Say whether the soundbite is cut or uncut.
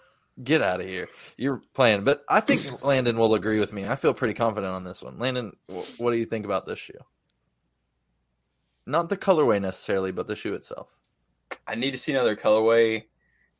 uncut